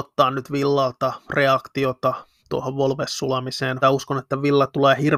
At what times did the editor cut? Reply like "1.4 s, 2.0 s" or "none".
3.8 s